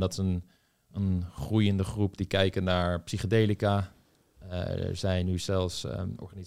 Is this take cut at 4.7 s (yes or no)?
no